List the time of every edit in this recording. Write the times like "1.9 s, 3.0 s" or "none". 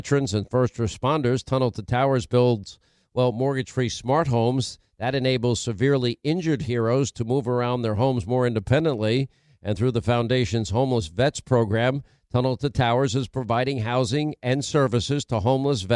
none